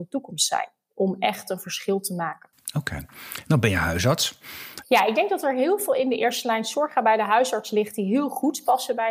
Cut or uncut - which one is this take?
cut